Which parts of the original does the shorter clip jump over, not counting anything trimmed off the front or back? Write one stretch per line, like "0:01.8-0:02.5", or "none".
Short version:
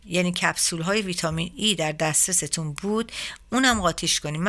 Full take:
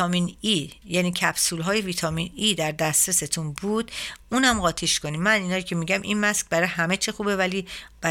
none